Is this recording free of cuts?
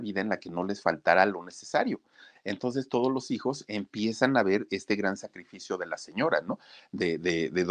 yes; 0 cuts

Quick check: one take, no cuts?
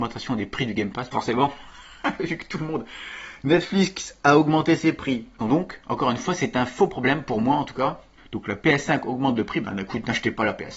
no; 3 cuts; at 1.1 s, 5.4 s, 8.2 s

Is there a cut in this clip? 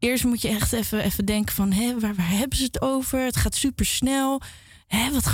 no; 0 cuts

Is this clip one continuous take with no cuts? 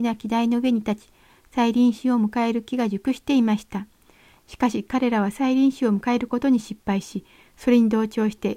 yes; 0 cuts

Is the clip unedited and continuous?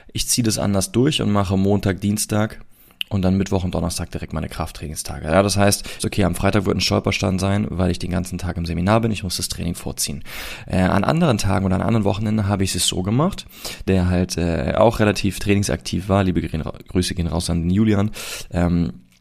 no; 2 cuts; at 6.0 s, 13.9 s

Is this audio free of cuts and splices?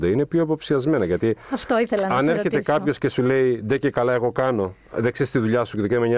yes; 0 cuts

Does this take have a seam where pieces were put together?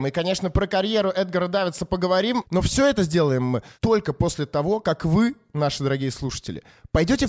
no; 0 cuts

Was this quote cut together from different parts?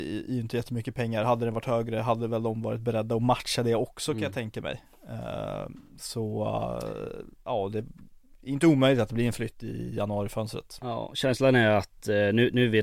no; 0 cuts

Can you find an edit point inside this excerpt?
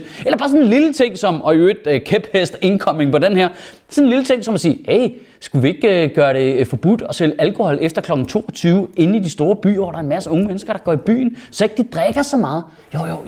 no; 0 cuts

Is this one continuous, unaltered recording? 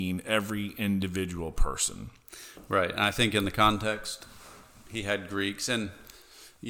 yes; 0 cuts

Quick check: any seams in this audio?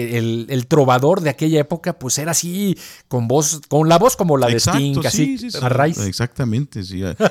yes; 1 cut; at 5.6 s

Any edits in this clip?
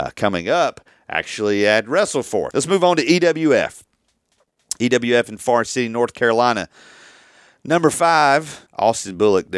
yes; 2 cuts; at 2.5 s, 8.7 s

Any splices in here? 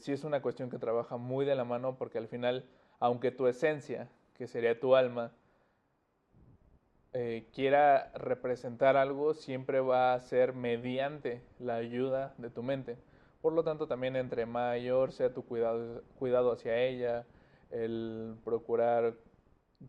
no; 0 cuts

